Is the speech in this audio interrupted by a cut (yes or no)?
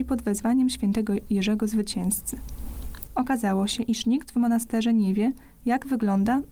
yes